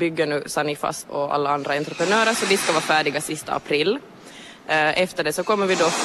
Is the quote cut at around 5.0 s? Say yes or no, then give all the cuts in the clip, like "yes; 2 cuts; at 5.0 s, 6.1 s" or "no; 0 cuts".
no; 1 cut; at 1.1 s